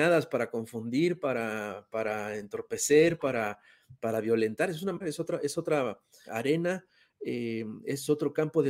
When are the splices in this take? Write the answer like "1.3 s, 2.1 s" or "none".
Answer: 5.0 s, 6.3 s